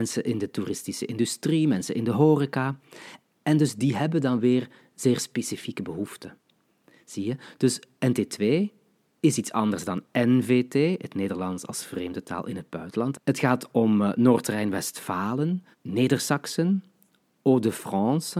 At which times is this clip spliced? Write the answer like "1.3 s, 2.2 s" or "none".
9.1 s, 13.1 s, 15.7 s